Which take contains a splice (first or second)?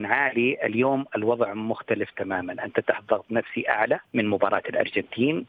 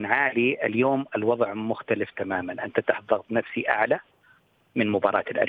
first